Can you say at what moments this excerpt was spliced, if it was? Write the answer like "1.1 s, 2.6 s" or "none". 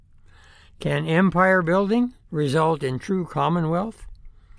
2.3 s